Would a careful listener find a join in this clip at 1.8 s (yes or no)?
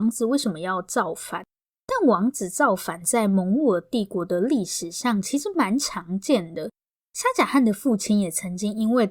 no